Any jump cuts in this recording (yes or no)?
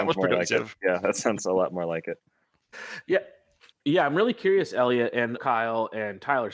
yes